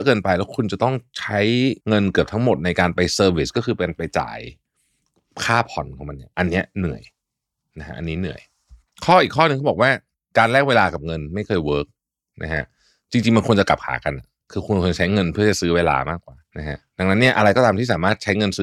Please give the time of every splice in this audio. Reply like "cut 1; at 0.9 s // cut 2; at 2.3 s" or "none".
cut 1; at 1.8 s // cut 2; at 16.4 s